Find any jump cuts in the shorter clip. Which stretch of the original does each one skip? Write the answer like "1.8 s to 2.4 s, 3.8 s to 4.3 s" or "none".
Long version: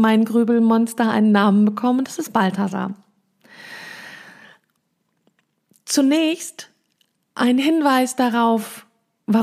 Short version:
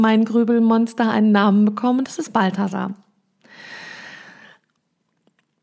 none

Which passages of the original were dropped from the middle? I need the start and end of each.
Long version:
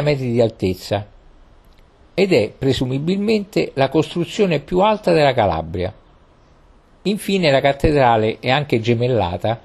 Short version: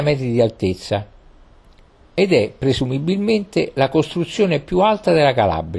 none

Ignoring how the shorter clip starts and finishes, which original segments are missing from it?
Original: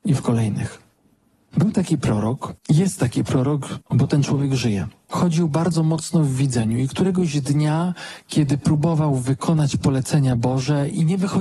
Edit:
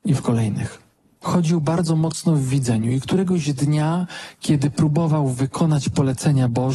1.2 s to 5.0 s

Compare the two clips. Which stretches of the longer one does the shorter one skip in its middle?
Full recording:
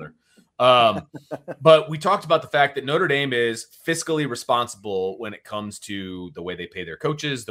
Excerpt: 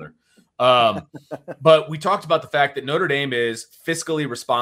none

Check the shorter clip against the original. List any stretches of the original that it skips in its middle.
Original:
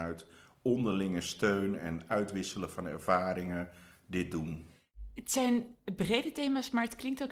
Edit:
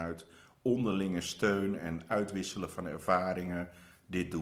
none

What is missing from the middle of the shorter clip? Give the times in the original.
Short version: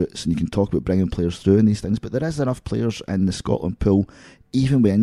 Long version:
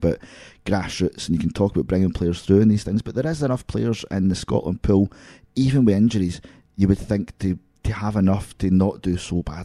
none

